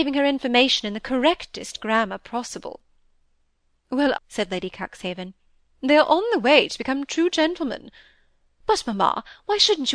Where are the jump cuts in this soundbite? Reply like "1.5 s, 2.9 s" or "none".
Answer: 4.1 s